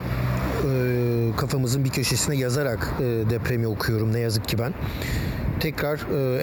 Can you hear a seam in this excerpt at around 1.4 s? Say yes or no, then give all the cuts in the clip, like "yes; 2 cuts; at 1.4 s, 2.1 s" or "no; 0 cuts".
no; 0 cuts